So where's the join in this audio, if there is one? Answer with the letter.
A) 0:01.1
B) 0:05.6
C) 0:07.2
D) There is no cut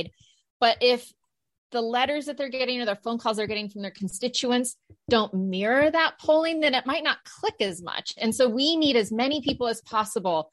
C